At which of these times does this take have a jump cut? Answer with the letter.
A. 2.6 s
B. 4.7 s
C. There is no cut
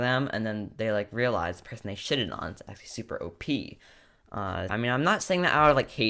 B